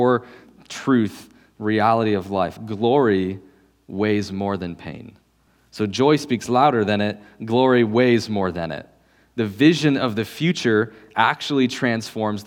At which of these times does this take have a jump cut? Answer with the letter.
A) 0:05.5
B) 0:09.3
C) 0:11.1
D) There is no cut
D